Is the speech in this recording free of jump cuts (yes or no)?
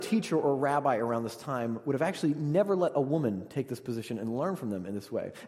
yes